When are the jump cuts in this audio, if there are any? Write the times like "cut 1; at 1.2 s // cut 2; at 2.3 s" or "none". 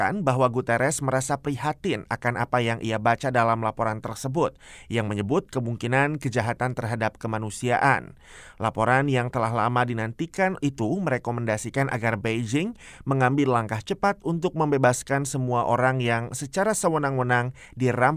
none